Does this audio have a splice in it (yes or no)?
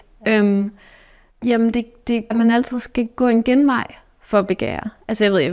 yes